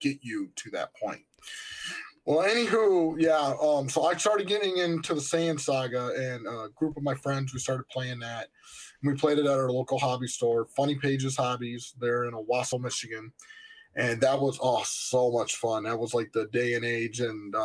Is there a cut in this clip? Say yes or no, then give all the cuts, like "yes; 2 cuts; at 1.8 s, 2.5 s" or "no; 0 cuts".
no; 0 cuts